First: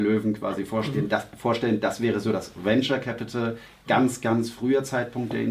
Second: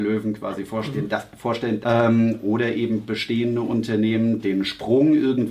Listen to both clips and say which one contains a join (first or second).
second